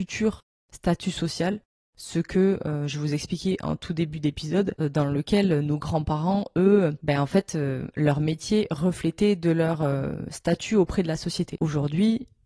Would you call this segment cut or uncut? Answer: uncut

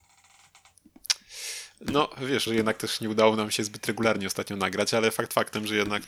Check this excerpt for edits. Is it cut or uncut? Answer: cut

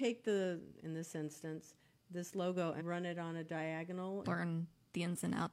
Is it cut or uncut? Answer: cut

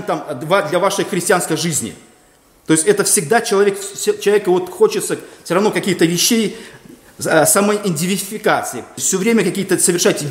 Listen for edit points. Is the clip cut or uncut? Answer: cut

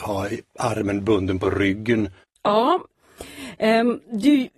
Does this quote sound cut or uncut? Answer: cut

